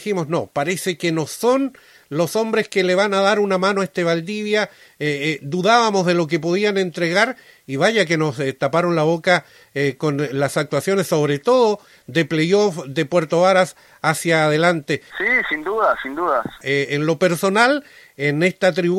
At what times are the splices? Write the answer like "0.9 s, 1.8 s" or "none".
15.1 s, 16.6 s